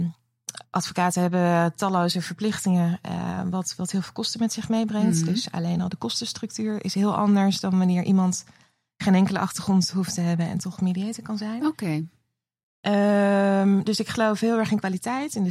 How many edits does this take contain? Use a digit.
0